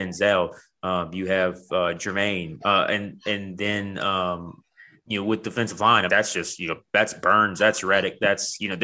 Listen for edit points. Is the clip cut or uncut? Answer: cut